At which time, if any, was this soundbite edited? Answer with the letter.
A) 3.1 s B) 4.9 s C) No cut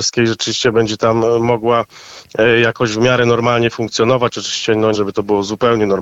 B